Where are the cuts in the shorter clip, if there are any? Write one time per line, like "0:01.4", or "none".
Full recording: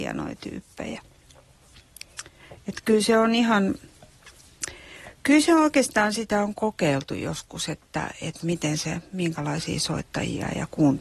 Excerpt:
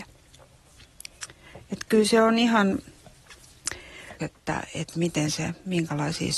0:04.2